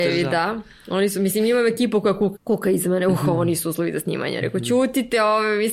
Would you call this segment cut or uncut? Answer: cut